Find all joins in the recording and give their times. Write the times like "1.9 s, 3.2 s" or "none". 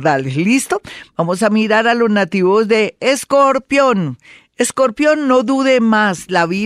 none